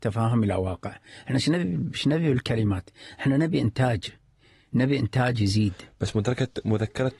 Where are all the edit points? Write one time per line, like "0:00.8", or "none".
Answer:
none